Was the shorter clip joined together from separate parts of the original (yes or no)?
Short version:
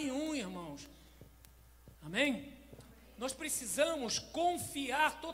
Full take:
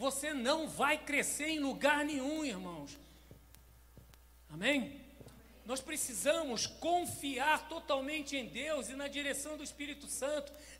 yes